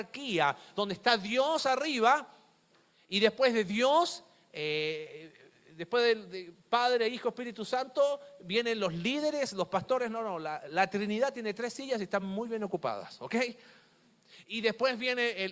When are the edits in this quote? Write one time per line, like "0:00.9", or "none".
none